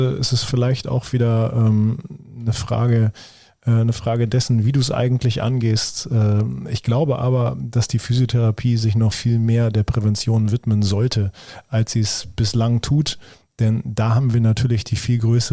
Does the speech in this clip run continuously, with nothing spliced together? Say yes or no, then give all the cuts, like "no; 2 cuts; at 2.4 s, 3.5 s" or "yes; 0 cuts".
no; 1 cut; at 9.1 s